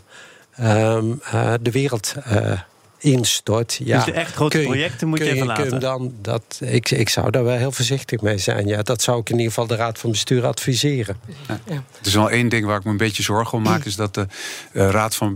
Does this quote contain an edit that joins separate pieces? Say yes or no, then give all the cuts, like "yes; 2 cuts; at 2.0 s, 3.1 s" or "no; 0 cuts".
no; 0 cuts